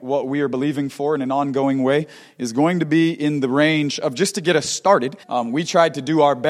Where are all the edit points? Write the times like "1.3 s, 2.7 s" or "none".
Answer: 5.2 s